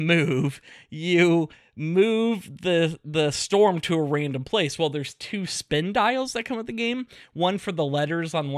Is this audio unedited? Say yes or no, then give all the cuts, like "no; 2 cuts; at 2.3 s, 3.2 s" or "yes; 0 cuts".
yes; 0 cuts